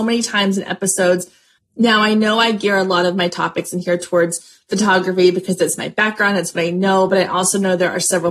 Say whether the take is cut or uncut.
cut